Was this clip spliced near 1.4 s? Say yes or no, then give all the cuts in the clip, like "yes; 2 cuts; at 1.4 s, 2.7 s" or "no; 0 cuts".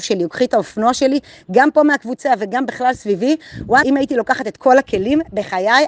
no; 1 cut; at 3.8 s